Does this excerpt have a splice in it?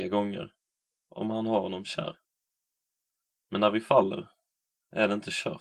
yes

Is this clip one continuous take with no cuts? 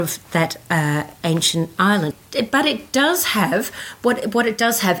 no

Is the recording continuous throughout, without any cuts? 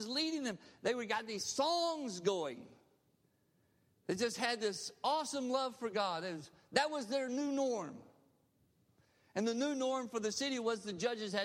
yes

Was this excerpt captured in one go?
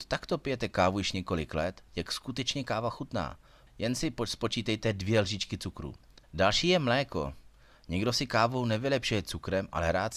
no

